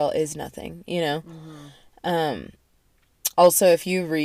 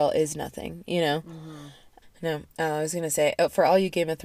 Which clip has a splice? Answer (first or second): second